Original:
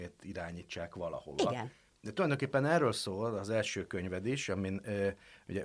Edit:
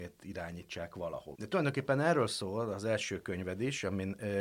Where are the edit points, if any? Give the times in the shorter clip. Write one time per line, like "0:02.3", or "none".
0:01.3